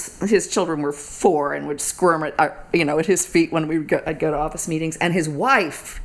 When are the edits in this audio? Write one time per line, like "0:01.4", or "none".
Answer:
none